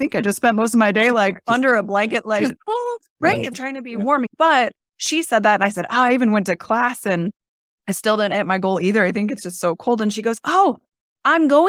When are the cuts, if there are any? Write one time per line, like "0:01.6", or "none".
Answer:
none